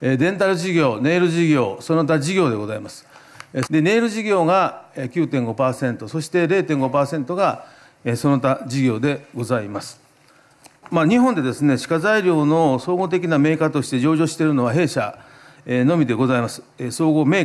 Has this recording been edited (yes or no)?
yes